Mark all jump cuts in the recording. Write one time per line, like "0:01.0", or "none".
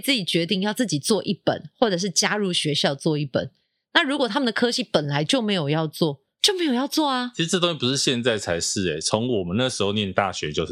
none